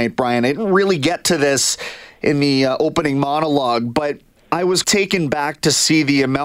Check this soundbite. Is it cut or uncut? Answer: cut